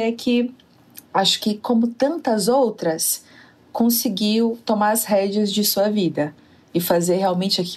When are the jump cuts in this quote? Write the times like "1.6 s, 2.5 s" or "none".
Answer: none